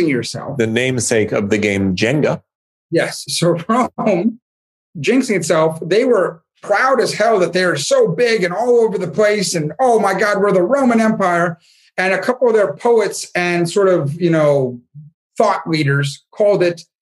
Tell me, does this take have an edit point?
no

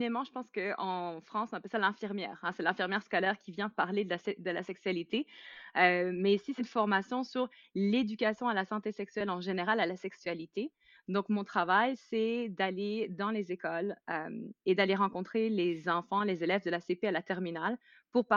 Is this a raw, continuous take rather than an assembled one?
no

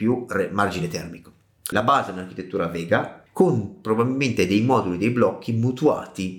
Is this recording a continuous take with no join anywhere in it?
no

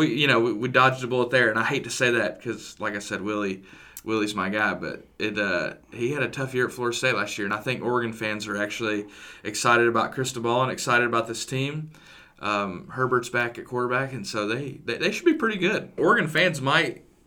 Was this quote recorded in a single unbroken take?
no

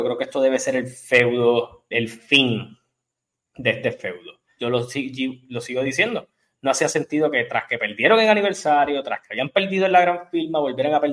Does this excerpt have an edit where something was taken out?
yes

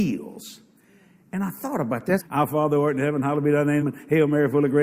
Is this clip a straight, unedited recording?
no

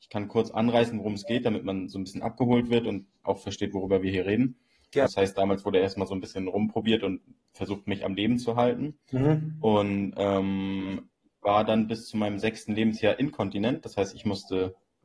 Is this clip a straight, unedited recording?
no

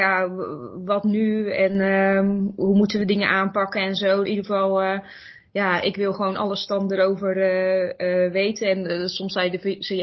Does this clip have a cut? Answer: yes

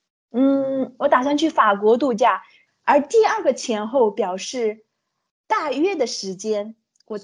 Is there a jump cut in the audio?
yes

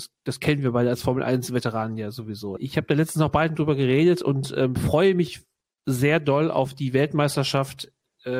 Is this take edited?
yes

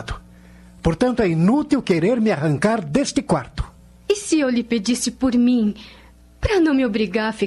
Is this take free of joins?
yes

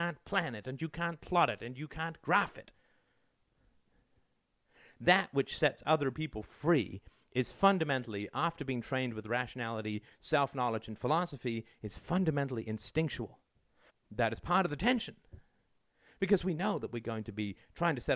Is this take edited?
yes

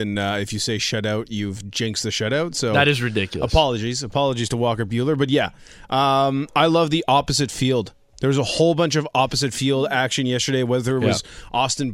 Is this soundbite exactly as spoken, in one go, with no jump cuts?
yes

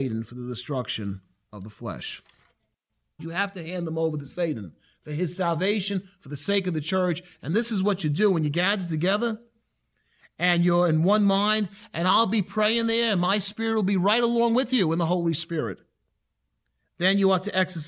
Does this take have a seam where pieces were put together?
yes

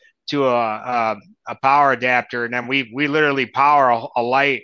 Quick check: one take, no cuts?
yes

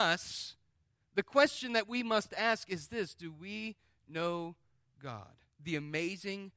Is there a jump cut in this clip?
yes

